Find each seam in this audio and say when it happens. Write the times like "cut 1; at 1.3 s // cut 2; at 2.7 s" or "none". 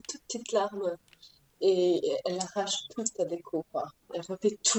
none